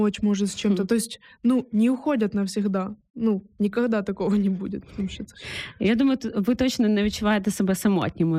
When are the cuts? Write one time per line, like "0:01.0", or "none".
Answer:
none